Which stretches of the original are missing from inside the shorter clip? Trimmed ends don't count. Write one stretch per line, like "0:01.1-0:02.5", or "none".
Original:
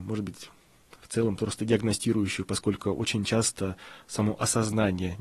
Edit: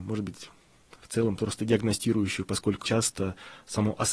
0:02.8-0:03.3